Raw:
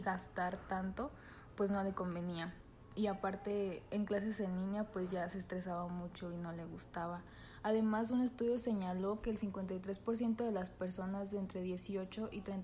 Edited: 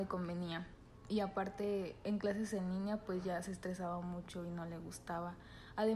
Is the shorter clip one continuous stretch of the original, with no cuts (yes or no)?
yes